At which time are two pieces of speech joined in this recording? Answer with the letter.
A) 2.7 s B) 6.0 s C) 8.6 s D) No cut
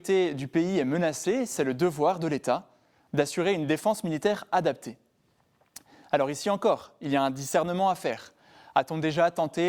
D